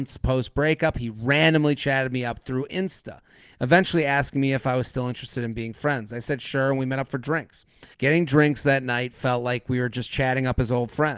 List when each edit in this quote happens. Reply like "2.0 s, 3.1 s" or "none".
7.9 s

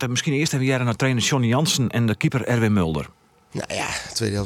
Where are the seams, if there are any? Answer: none

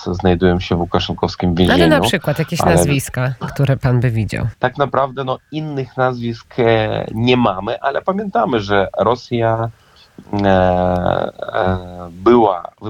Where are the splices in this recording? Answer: 4.5 s

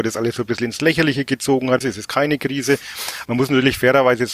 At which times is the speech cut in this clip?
1.8 s, 3.2 s

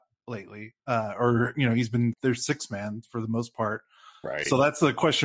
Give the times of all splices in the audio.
2.1 s

